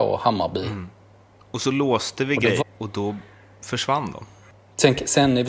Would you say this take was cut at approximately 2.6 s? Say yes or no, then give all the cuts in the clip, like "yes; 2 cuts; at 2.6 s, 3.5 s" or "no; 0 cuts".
yes; 1 cut; at 2.6 s